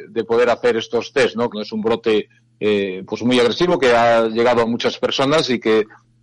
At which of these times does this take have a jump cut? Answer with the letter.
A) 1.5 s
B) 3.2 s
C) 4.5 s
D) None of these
A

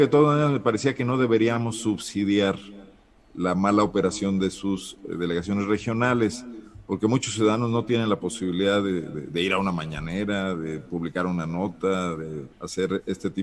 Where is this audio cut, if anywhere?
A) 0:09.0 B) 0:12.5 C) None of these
B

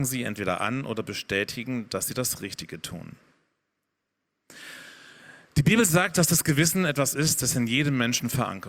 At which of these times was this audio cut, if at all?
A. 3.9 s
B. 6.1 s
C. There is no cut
C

